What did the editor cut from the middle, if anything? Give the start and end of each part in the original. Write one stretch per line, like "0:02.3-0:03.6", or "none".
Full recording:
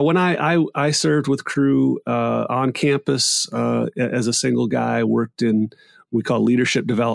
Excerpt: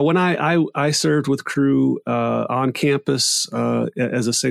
none